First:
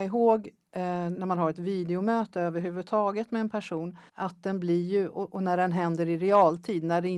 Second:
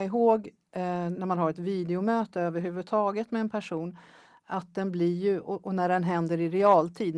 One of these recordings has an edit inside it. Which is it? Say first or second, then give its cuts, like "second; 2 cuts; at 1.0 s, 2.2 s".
first; 1 cut; at 4.1 s